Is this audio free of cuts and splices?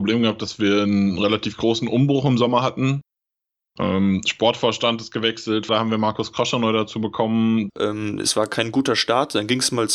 no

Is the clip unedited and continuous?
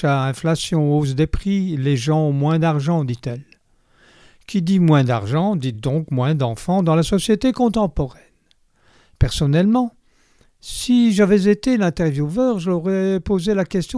yes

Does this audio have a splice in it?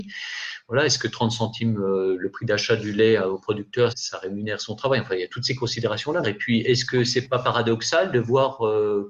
yes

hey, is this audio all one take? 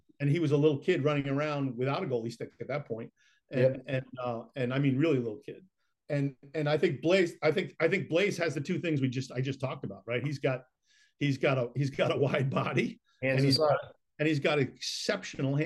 yes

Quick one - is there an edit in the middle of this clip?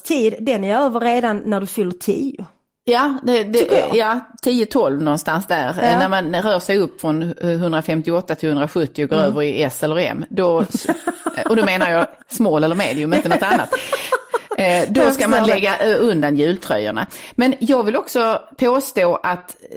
no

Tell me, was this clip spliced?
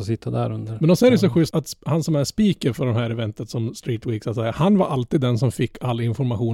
yes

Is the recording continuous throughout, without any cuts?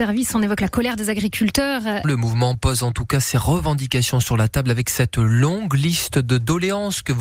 no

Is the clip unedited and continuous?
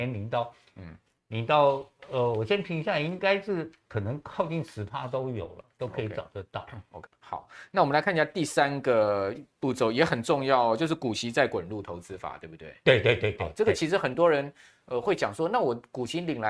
no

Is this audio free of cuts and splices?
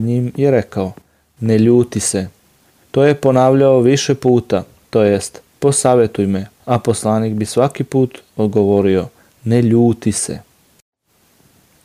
no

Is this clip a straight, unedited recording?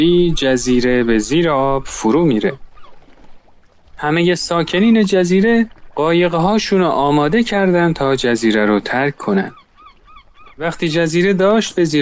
no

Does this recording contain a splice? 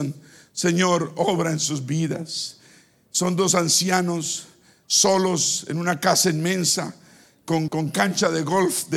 yes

